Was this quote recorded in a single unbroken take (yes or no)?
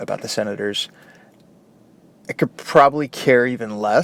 yes